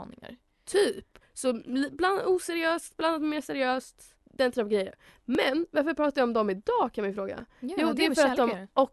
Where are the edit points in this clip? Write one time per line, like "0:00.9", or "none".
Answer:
0:01.2
0:04.2

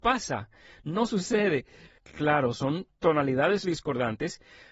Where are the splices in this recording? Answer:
0:01.9
0:03.6

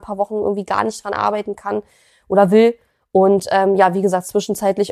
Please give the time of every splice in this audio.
none

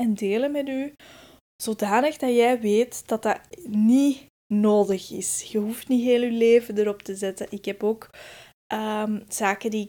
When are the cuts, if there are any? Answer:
none

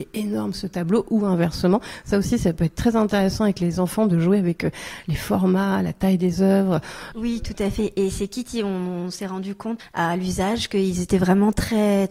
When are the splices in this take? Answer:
0:07.1
0:09.8

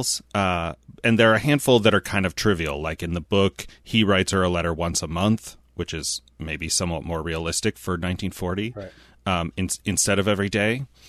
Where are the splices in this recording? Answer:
none

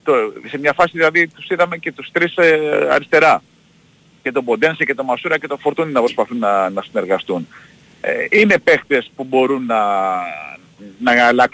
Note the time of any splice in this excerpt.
none

